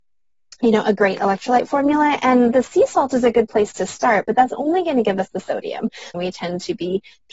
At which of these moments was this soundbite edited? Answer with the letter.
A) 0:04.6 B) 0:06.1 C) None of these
B